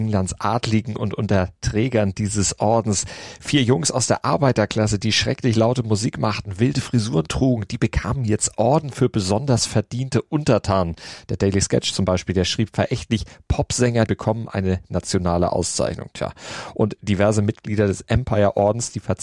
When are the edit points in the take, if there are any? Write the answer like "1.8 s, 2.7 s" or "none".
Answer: 11.3 s, 14.1 s